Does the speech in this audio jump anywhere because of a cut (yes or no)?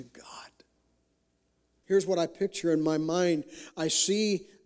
yes